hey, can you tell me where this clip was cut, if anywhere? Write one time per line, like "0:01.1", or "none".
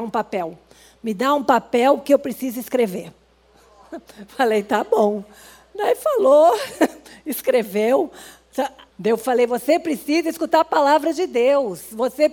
0:08.9